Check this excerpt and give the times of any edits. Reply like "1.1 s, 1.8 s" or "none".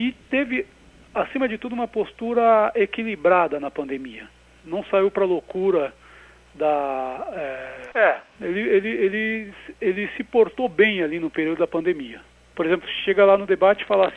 7.9 s, 12.5 s